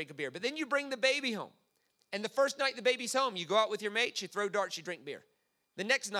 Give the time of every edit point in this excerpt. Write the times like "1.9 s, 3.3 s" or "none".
none